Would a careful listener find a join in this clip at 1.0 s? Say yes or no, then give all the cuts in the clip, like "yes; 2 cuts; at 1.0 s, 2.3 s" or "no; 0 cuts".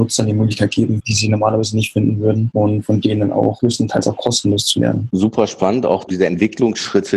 yes; 1 cut; at 1.0 s